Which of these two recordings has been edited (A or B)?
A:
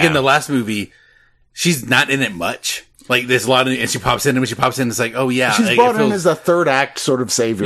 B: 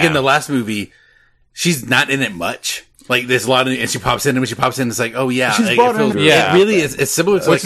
B